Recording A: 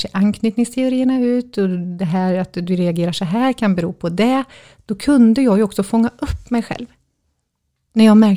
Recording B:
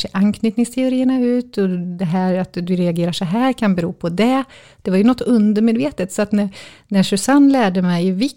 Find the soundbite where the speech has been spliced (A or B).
B